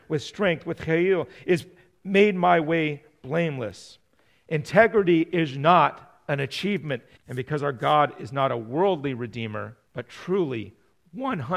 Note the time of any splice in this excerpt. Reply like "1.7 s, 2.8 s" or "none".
7.2 s, 9.9 s